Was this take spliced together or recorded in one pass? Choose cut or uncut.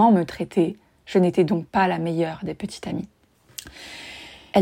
uncut